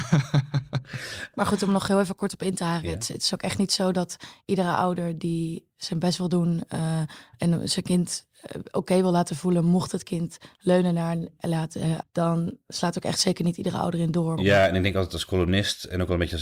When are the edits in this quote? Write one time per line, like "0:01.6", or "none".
0:12.0
0:14.4